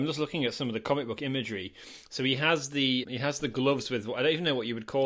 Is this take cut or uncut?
cut